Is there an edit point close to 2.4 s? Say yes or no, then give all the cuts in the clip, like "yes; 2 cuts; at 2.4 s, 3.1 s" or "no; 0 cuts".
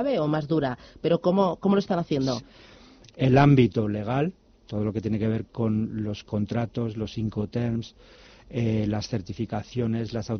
yes; 1 cut; at 2.4 s